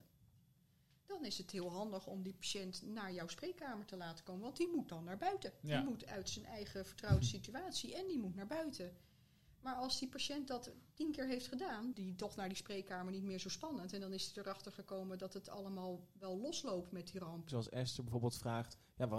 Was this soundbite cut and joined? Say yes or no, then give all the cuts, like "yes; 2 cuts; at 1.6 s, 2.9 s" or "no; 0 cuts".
yes; 2 cuts; at 11.9 s, 17.5 s